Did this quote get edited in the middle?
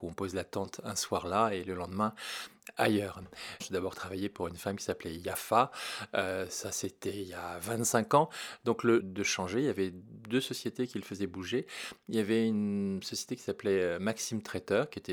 yes; 2 cuts; at 3.6 s, 9.0 s

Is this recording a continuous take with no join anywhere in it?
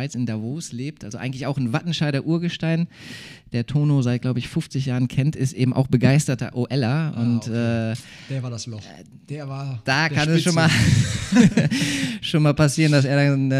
yes; 0 cuts

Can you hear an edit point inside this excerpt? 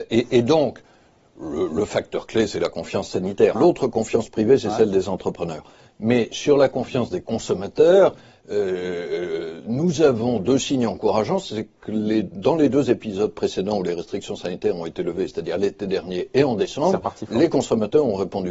yes; 1 cut; at 3.5 s

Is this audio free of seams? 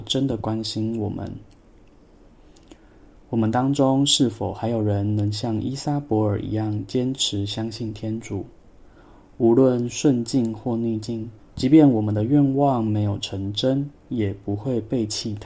no; 1 cut; at 11.4 s

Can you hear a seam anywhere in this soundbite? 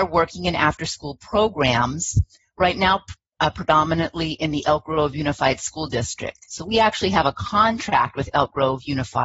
no; 0 cuts

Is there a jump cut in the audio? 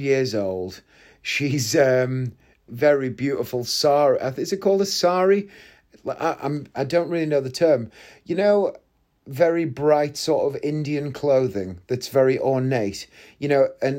yes; 1 cut; at 2.7 s

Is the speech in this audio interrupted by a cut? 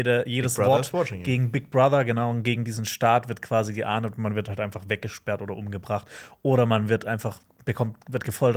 no; 0 cuts

